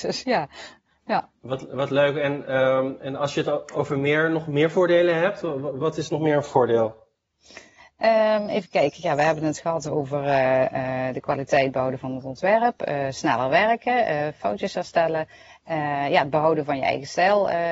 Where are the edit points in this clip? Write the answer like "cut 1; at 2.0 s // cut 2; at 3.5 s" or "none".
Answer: none

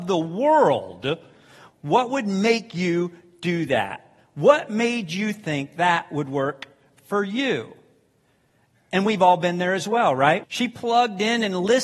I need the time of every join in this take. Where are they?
cut 1; at 1.7 s // cut 2; at 10.4 s

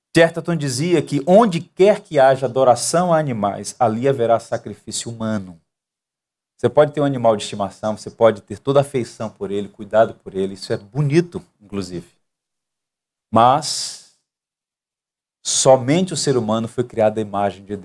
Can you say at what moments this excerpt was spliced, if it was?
none

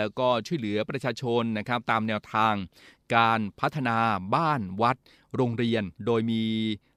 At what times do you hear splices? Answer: cut 1; at 6.0 s

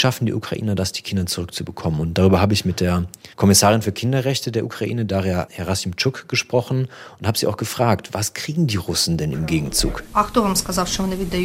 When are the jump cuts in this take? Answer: cut 1; at 3.3 s

